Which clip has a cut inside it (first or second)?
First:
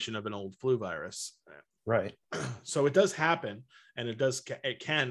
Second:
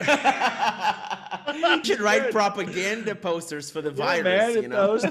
second